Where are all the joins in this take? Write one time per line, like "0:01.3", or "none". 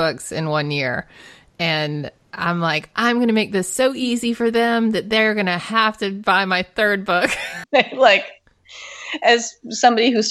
0:07.6